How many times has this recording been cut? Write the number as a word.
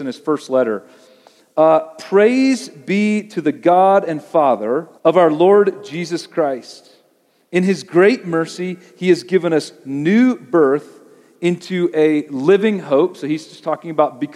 one